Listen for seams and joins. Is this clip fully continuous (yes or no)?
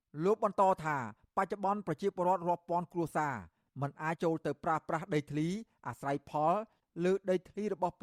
no